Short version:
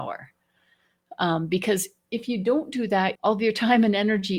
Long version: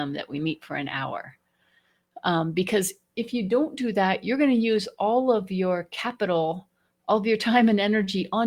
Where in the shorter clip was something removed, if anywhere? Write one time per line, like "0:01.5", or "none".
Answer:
0:03.2